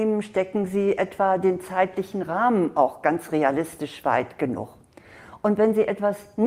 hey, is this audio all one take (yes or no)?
yes